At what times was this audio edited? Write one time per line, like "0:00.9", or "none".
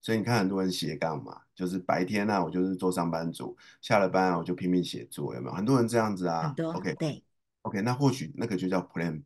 none